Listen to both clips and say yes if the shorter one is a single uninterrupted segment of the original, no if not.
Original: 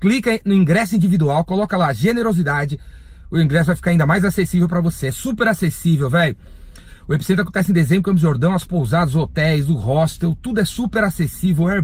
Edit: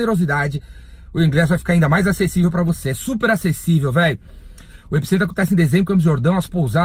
yes